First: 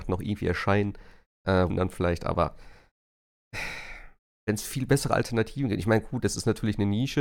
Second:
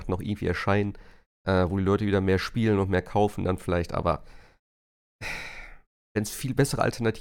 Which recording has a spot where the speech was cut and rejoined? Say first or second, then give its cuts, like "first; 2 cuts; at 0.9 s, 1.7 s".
first; 1 cut; at 1.7 s